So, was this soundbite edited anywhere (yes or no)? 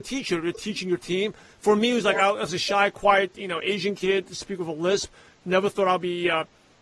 no